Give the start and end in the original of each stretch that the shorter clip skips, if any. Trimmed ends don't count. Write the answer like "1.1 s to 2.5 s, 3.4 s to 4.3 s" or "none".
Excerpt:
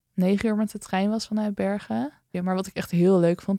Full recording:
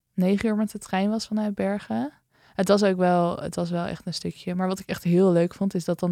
2.3 s to 4.5 s